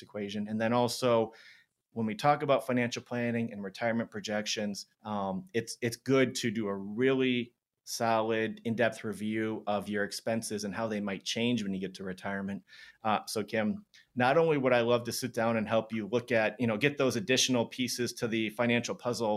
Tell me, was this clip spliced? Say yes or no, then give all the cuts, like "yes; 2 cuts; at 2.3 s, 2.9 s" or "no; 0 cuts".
yes; 1 cut; at 4.9 s